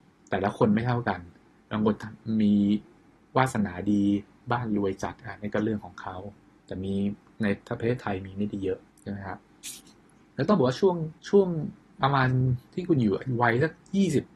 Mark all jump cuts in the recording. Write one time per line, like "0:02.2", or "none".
0:08.9
0:11.2